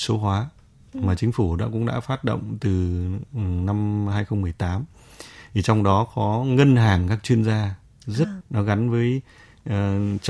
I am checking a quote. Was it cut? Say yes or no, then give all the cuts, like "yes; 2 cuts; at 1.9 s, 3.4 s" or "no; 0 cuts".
yes; 1 cut; at 8.4 s